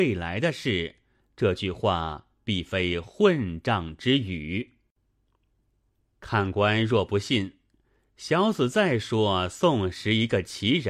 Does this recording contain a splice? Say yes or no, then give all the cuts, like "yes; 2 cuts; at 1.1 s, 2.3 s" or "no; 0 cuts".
no; 0 cuts